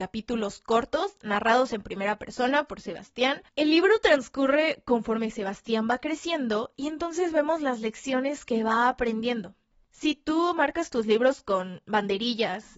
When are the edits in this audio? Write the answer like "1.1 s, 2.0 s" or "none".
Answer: 3.5 s